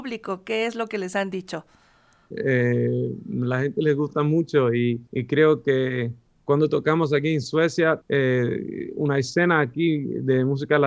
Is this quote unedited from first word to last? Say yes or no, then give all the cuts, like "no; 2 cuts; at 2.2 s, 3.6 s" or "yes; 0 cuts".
no; 3 cuts; at 2.3 s, 5.1 s, 8.0 s